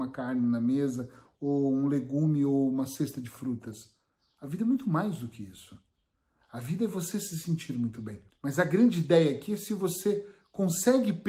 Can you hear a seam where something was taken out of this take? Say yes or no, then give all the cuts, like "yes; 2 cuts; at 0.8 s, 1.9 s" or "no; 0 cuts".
yes; 1 cut; at 8.3 s